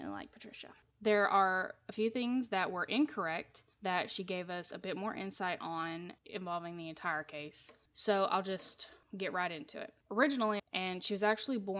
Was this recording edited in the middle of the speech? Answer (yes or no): yes